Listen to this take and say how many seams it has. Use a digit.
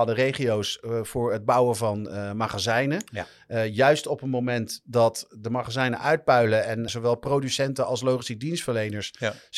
1